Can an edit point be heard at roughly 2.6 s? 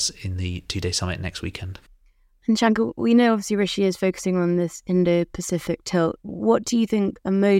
no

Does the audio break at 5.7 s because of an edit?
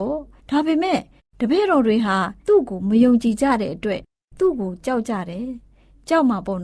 no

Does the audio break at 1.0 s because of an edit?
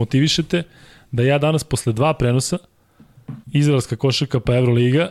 no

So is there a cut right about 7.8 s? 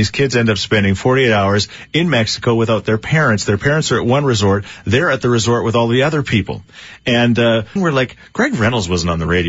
yes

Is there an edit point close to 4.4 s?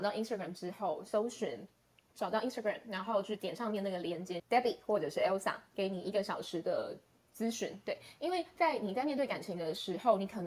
yes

